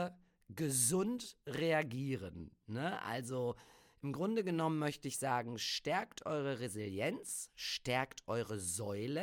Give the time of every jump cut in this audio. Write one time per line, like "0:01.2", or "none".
none